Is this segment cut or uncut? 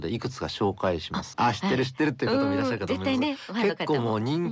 cut